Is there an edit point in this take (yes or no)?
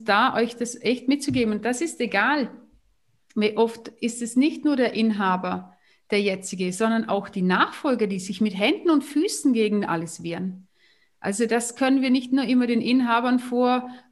no